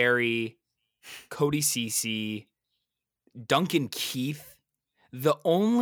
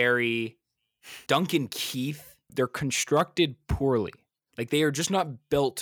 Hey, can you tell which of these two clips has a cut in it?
second; 2 cuts; at 1.3 s, 2.5 s

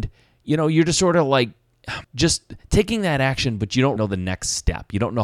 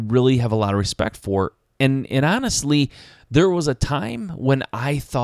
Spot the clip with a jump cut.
first; 2 cuts; at 2.0 s, 4.0 s

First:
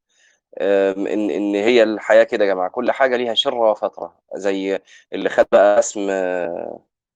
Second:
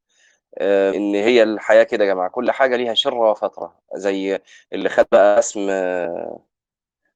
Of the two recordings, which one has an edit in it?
second; 1 cut; at 0.9 s

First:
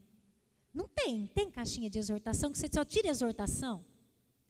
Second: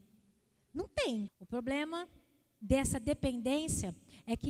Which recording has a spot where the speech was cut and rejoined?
second; 1 cut; at 1.3 s

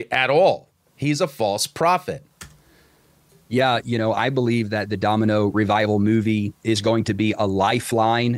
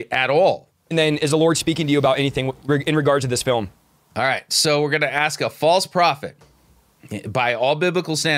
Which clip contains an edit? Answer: second; 1 cut; at 0.9 s

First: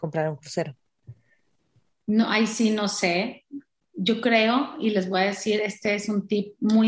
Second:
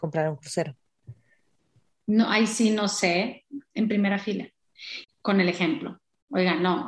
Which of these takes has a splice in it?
second; 2 cuts; at 3.7 s, 5.0 s

